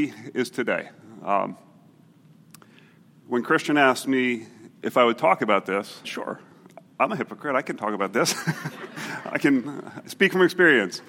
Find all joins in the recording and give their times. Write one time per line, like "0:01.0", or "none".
0:06.0